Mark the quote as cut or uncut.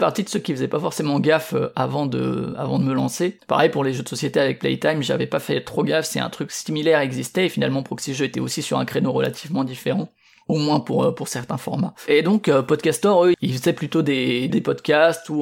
cut